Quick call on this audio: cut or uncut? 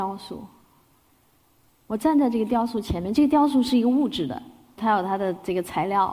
cut